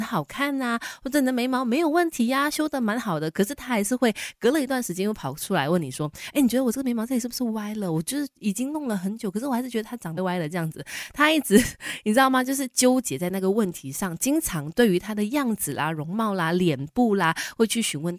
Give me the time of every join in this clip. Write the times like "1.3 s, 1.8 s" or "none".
10.2 s